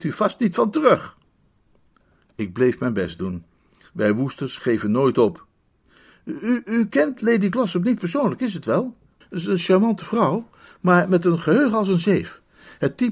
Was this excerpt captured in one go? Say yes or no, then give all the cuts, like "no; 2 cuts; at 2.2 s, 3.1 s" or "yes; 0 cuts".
no; 1 cut; at 9.2 s